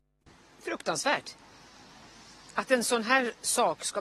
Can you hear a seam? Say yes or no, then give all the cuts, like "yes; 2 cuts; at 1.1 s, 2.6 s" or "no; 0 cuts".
no; 0 cuts